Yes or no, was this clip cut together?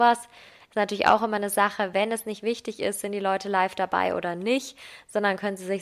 no